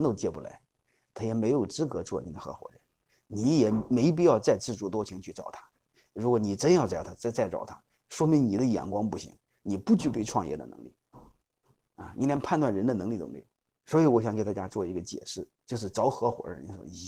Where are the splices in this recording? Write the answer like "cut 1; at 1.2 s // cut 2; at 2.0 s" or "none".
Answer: none